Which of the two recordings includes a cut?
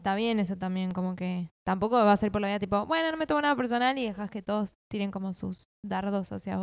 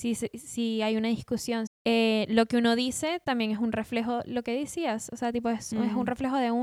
second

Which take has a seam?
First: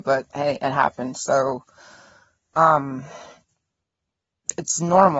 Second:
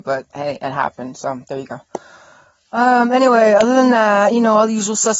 first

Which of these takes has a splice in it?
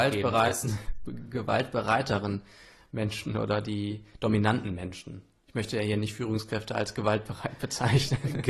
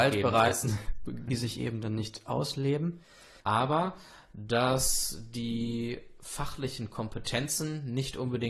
second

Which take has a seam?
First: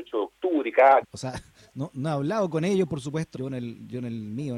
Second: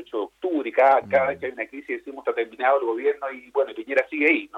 first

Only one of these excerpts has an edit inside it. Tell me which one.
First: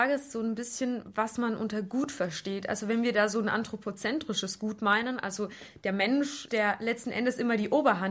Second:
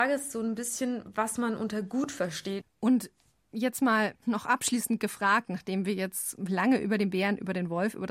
second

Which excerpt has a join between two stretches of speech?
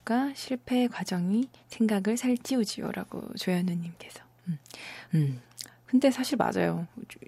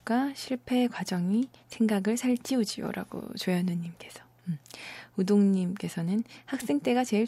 first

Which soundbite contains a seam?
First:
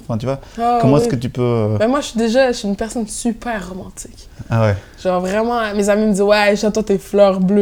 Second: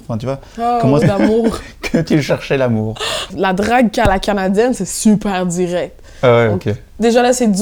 second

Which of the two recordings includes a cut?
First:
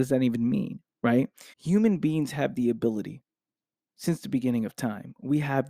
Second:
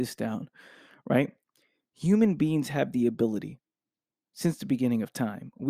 first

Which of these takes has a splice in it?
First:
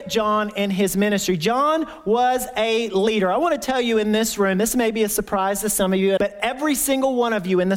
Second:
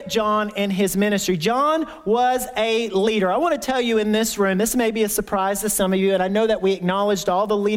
first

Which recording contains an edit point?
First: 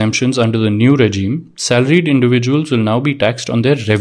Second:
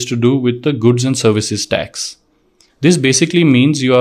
second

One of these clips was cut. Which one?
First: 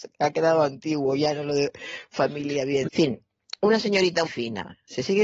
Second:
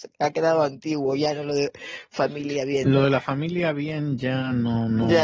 first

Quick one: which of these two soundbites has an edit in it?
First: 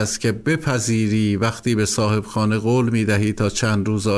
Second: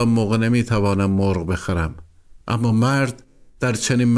second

